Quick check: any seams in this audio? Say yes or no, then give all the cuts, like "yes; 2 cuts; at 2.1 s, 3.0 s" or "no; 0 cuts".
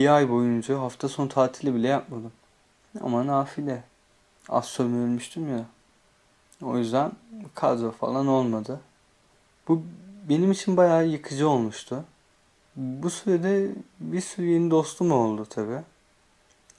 yes; 1 cut; at 12.6 s